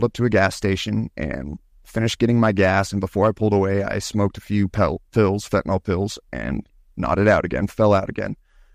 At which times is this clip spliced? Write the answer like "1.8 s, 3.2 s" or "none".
none